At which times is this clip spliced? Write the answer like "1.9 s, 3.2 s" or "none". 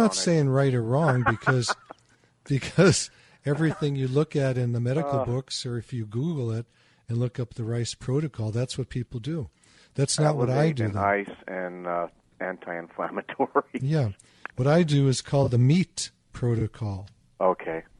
none